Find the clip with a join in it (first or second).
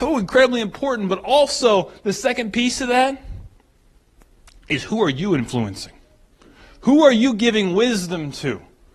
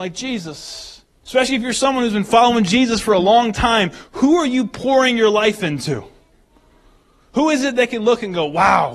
second